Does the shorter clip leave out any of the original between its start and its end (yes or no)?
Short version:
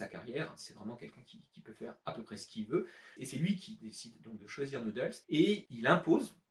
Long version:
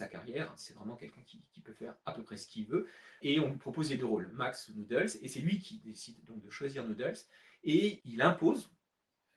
yes